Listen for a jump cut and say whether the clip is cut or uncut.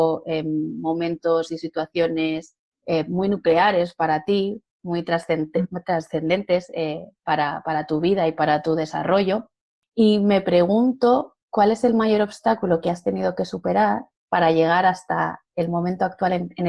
uncut